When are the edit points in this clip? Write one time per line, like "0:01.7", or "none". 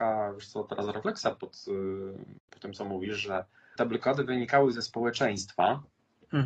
0:02.4
0:03.8